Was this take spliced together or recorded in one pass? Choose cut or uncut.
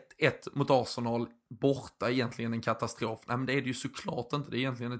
uncut